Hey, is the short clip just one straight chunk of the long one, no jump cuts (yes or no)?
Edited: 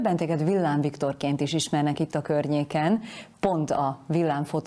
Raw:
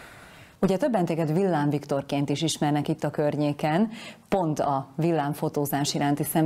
yes